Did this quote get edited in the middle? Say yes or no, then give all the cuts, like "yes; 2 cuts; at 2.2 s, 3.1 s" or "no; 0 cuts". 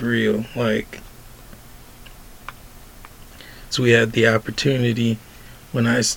yes; 1 cut; at 3.7 s